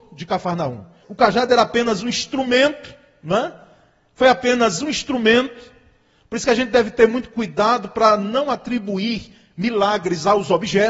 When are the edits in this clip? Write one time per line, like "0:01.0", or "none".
0:01.0